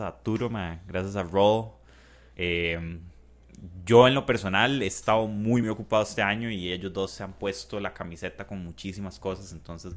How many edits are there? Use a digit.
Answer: 2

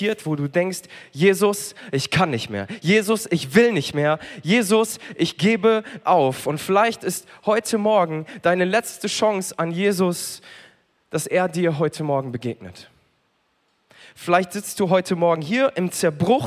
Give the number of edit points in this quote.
0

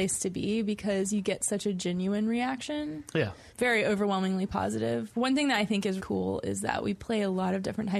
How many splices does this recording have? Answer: 2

